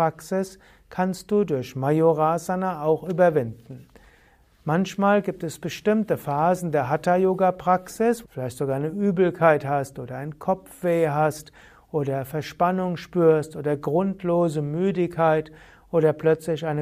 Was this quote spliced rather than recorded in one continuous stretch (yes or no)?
yes